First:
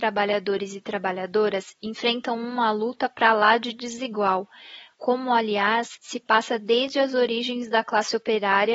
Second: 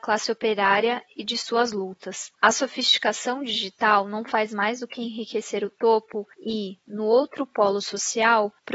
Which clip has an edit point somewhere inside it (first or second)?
second